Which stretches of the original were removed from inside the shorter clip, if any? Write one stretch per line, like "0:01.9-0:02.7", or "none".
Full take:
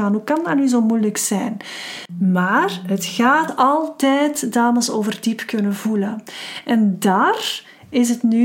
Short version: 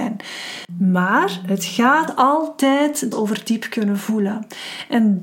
0:04.5-0:04.9